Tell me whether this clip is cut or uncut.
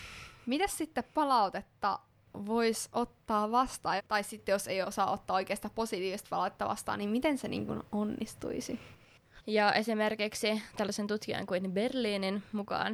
cut